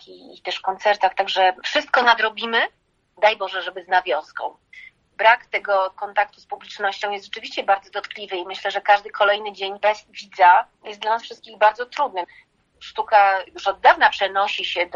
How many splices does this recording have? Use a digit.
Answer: 0